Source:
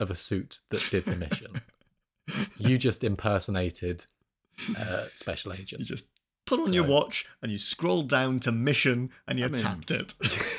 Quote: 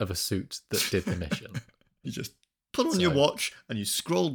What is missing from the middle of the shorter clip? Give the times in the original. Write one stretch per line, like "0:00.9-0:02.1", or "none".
0:02.0-0:05.8